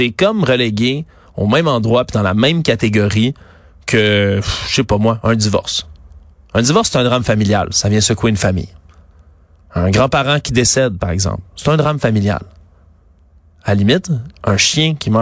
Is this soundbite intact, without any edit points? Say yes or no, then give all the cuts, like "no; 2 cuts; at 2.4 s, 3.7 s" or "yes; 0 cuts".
yes; 0 cuts